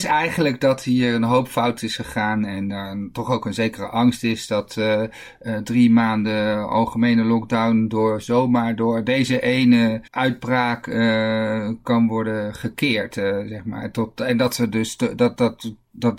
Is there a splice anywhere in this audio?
yes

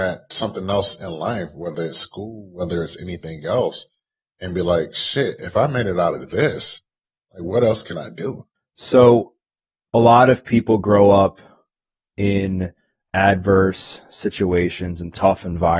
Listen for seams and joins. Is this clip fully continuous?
yes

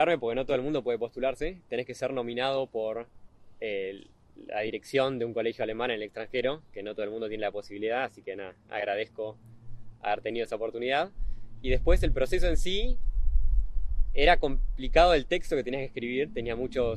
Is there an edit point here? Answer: no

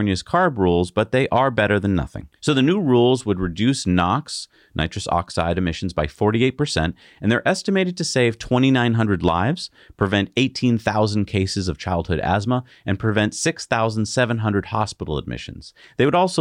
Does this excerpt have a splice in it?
no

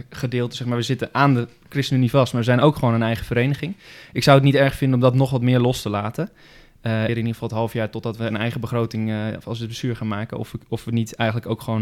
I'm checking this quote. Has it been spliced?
yes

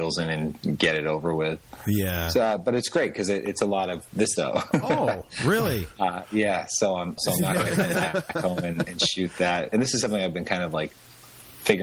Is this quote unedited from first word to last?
no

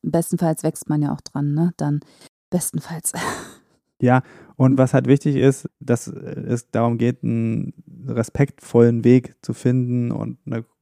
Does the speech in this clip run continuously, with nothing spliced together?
yes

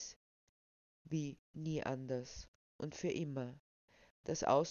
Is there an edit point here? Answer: no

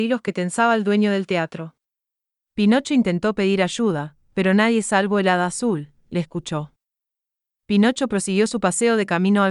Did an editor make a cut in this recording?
yes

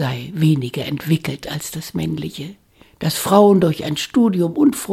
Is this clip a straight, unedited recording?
yes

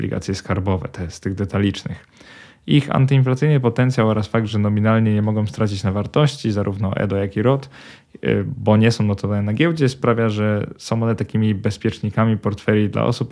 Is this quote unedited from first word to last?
yes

